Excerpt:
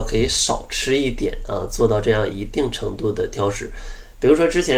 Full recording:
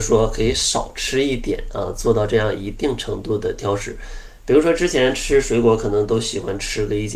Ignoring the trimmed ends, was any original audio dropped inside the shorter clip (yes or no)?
no